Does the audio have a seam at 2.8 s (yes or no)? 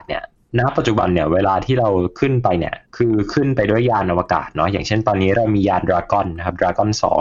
yes